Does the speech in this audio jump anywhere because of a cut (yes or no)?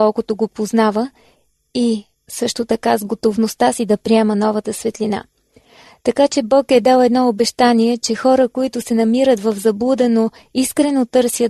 no